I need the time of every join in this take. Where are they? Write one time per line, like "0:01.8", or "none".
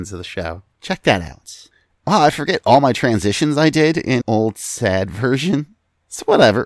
0:04.2